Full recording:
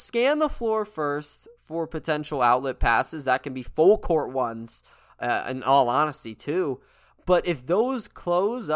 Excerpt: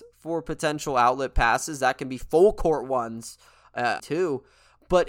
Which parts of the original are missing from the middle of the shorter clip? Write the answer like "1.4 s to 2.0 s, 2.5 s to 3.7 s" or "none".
5.4 s to 6.4 s